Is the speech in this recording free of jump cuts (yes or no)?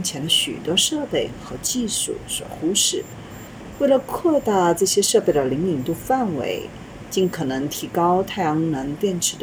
yes